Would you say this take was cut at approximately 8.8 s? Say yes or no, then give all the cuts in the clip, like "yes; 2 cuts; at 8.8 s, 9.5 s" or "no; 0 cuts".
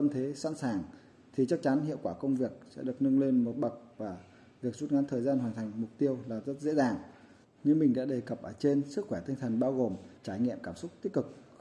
no; 2 cuts; at 7.4 s, 10.2 s